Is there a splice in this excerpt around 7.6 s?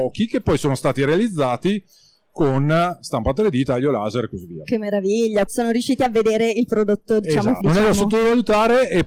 yes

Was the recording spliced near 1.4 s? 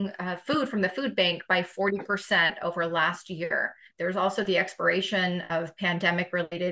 no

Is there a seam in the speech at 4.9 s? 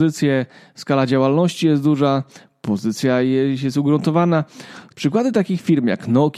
yes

